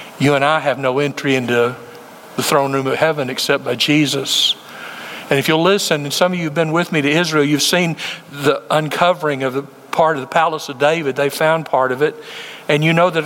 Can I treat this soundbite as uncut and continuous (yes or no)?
yes